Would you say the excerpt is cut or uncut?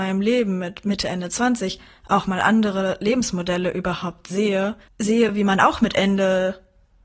uncut